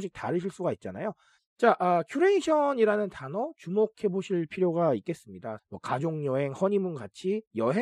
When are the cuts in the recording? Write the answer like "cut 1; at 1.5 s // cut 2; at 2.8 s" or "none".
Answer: cut 1; at 1.4 s // cut 2; at 5.6 s